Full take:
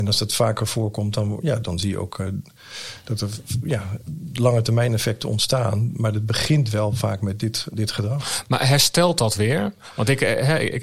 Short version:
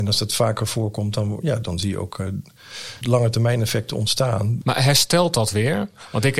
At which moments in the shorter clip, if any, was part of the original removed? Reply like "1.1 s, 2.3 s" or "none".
3.0 s, 4.6 s

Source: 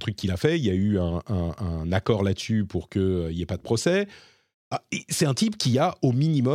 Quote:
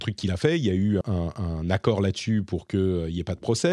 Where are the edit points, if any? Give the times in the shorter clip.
1.0 s

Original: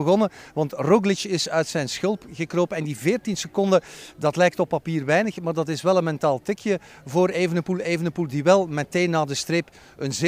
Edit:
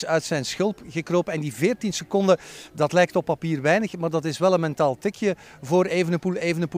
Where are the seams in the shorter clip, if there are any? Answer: none

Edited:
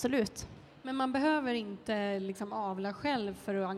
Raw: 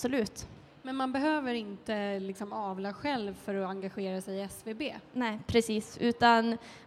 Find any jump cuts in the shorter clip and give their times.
none

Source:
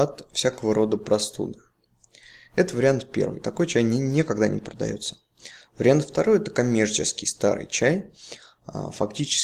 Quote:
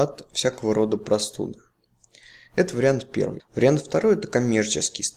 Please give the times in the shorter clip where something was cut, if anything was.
3.4 s

